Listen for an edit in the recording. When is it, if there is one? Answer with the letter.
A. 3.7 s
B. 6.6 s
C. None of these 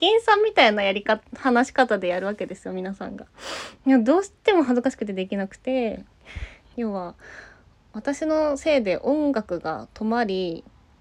B